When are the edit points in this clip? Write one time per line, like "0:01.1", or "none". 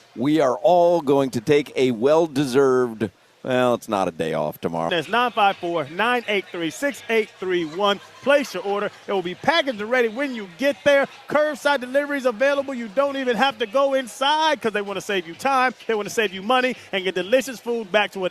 0:04.9